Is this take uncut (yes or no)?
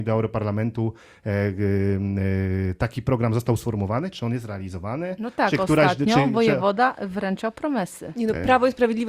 yes